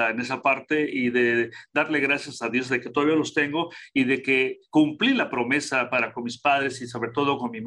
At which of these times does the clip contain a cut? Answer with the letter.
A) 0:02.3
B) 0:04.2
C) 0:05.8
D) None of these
D